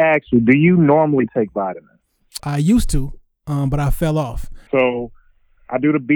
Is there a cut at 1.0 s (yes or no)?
no